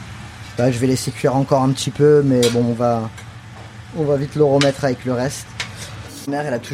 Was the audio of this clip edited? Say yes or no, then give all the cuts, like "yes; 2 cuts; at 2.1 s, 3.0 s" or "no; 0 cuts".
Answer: no; 0 cuts